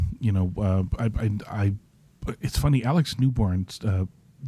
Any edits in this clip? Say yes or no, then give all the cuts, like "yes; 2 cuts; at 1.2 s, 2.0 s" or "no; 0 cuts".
no; 0 cuts